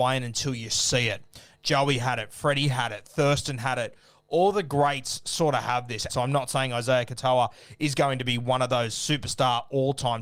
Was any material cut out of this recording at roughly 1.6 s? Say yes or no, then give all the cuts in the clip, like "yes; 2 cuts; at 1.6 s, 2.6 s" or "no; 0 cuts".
no; 1 cut; at 6.1 s